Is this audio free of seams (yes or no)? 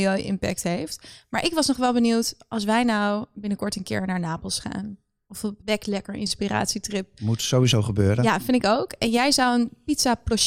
no